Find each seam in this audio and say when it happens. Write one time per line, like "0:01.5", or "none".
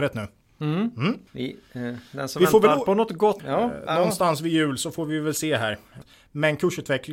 0:01.3
0:03.4
0:06.0